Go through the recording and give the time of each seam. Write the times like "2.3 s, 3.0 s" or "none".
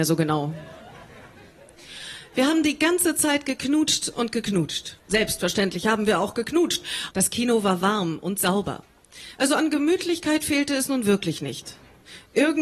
5.0 s, 7.1 s, 9.4 s